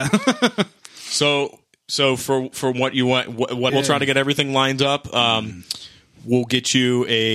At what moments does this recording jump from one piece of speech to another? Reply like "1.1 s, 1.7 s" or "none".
3.7 s